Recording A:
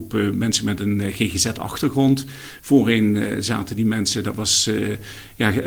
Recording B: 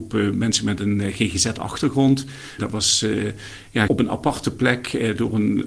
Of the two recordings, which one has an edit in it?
B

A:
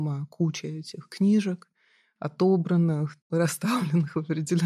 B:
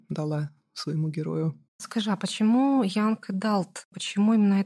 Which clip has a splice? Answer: B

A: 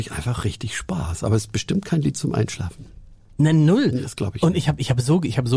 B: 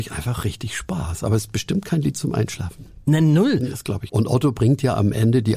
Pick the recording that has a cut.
B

